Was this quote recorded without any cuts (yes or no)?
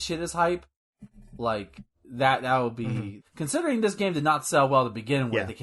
no